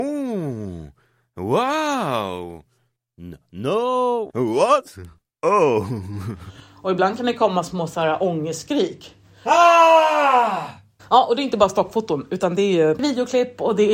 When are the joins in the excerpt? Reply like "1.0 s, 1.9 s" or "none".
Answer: 4.3 s, 11.0 s